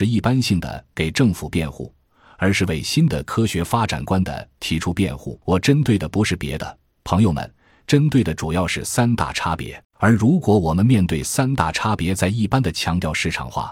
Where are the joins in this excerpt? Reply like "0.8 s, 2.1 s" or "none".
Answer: 5.4 s, 9.8 s